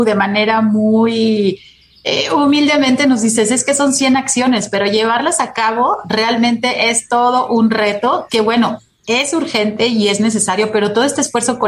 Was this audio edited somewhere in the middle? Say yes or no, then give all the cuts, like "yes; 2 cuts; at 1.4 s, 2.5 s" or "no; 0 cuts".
no; 0 cuts